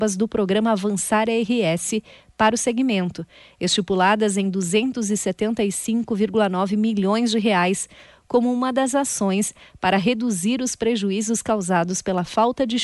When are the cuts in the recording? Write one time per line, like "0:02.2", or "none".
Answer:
none

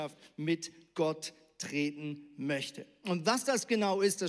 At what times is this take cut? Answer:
none

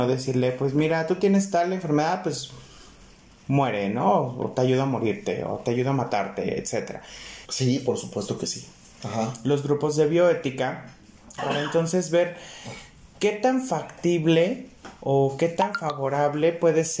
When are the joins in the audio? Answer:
0:07.4
0:09.0
0:11.4

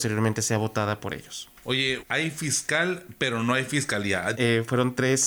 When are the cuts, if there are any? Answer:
0:02.0
0:04.3

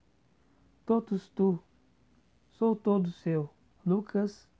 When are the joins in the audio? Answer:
0:03.7

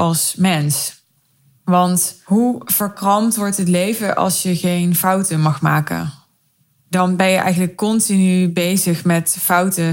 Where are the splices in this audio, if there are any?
none

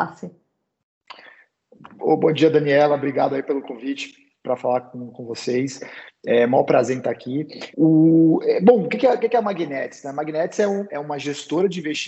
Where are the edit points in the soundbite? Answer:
0:07.7
0:10.9

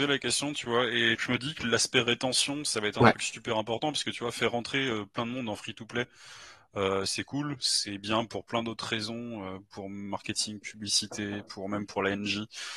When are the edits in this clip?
0:01.2

